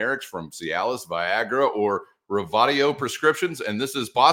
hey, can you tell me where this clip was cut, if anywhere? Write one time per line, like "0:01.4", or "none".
none